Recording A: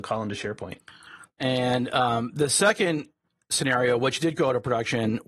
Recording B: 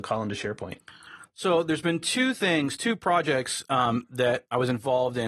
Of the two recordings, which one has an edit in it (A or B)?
A